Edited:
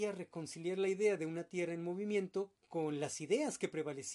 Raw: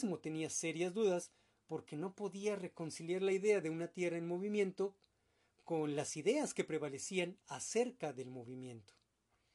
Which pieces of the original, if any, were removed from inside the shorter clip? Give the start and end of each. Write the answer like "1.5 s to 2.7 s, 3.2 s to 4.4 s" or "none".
5.0 s to 5.5 s